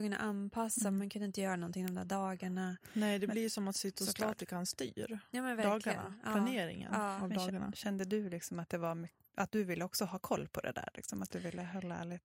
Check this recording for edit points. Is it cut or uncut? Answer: uncut